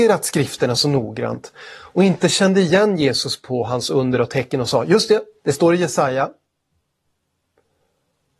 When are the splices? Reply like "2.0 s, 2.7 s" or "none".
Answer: none